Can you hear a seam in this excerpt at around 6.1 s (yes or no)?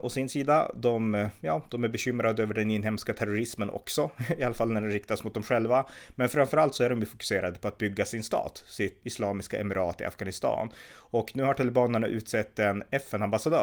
no